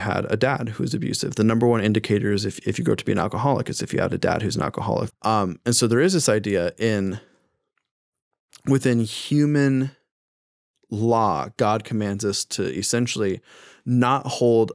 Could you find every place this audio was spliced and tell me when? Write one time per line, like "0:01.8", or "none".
0:05.1